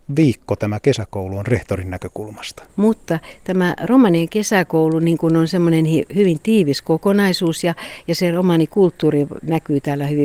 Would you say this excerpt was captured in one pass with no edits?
no; 1 cut; at 2.7 s

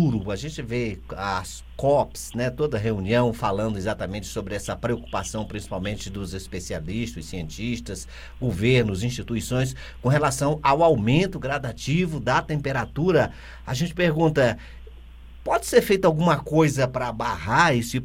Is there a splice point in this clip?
no; 0 cuts

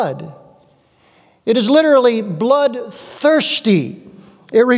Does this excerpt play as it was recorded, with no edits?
yes; 0 cuts

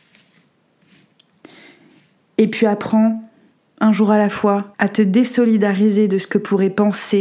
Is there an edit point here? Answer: yes; 1 cut; at 4.7 s

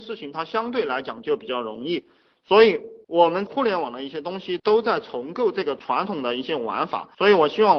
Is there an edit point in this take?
no; 0 cuts

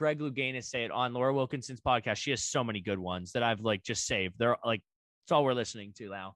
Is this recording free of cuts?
yes; 0 cuts

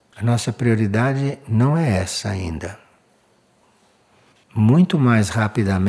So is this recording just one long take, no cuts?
no; 1 cut; at 4.3 s

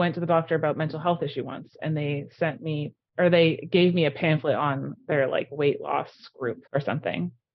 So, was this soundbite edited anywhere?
yes; 1 cut; at 6.7 s

